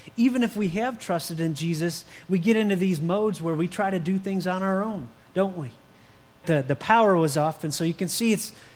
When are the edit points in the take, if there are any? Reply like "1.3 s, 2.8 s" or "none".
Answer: 6.4 s, 7.6 s